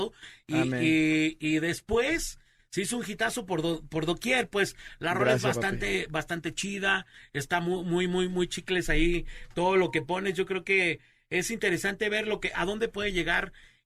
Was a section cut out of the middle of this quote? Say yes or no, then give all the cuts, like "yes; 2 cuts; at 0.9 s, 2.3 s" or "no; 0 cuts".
no; 0 cuts